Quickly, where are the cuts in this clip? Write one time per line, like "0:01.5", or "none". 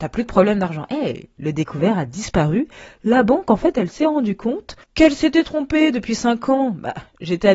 0:04.8